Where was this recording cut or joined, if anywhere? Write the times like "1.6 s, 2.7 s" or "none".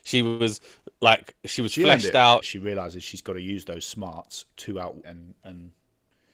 2.4 s, 5.0 s